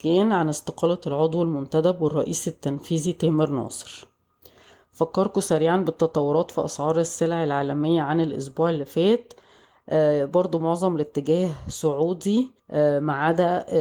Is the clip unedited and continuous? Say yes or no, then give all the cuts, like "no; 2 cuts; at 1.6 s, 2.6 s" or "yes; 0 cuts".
no; 1 cut; at 12.6 s